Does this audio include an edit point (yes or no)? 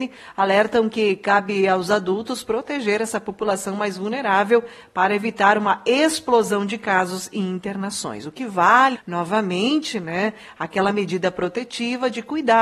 yes